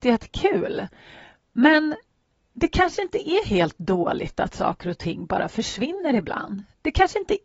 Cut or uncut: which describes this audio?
uncut